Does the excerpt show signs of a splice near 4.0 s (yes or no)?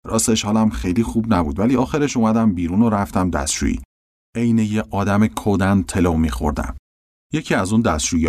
no